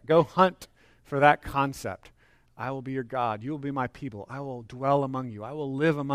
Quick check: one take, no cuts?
yes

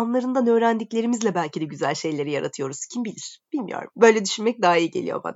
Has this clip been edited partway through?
no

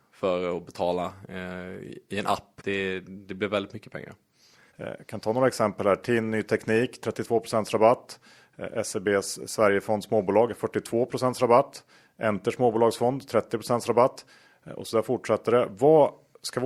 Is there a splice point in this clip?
yes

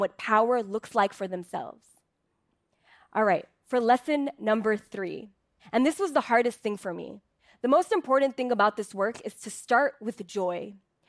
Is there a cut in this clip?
no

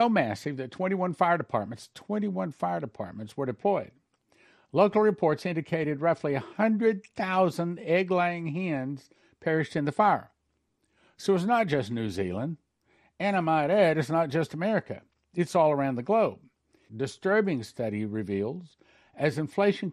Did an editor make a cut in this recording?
yes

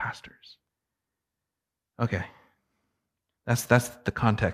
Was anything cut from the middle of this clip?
no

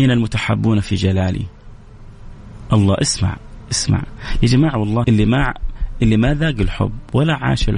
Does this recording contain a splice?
yes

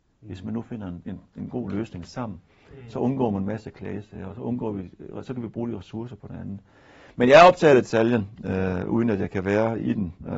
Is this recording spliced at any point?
no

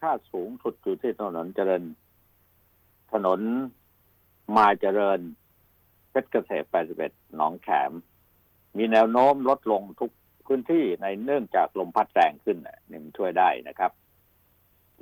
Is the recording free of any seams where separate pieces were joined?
yes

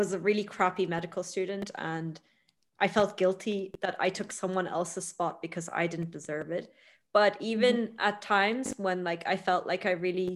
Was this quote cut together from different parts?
no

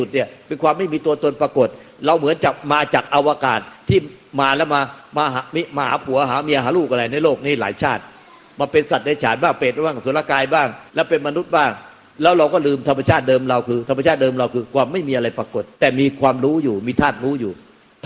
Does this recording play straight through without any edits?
no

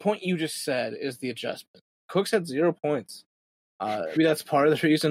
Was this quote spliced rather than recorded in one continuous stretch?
yes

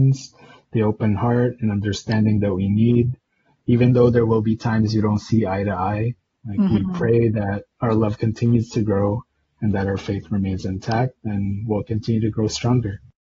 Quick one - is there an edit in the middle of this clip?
no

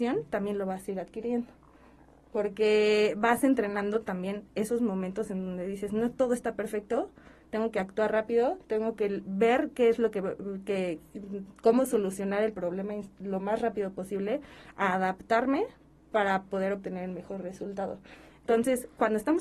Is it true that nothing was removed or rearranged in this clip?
yes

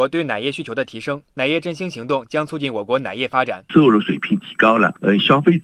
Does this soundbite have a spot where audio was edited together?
yes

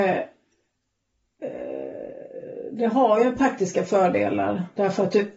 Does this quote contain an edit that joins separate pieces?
no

